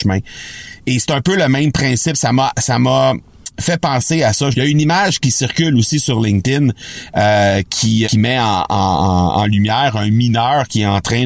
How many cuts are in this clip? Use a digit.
2